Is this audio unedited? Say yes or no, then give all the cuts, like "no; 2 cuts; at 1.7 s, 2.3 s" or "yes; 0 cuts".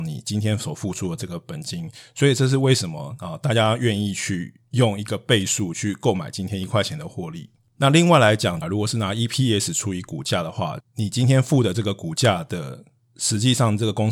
no; 2 cuts; at 8.6 s, 10.8 s